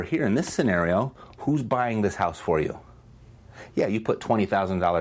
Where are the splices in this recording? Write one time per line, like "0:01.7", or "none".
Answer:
none